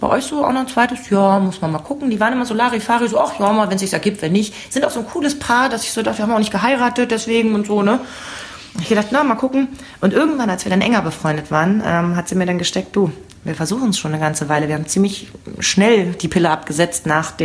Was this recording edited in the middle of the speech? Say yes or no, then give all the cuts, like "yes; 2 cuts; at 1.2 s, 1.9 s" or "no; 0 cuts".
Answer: no; 0 cuts